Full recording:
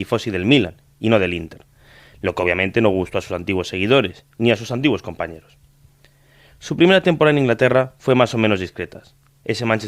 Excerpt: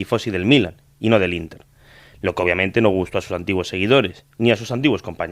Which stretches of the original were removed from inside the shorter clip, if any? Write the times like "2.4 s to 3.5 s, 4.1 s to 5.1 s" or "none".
none